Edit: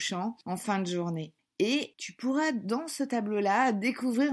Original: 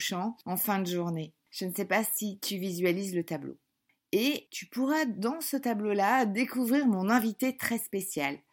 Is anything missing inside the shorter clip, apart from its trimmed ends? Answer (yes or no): yes